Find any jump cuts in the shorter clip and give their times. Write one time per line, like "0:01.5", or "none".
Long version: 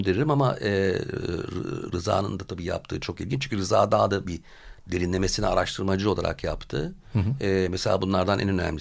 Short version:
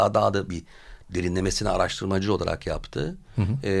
none